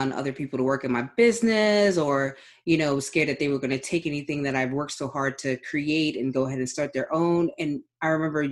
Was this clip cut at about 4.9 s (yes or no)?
no